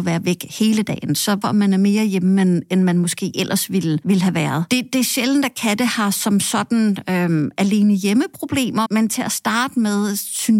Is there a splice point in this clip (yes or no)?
yes